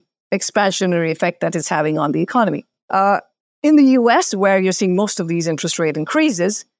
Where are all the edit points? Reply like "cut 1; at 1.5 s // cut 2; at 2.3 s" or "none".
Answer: none